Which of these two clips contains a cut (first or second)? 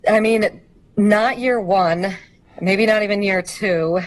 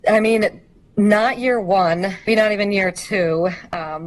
second